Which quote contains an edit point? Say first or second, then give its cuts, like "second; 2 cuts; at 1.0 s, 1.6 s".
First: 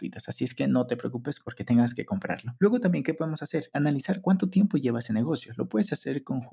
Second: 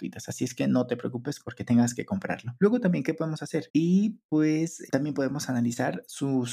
second; 1 cut; at 3.7 s